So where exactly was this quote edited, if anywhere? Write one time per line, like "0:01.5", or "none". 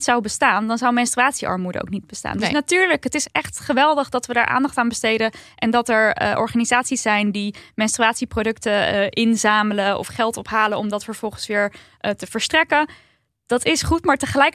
none